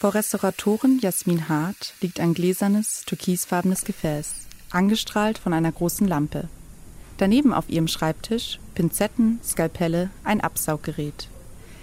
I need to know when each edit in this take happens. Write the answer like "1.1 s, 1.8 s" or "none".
none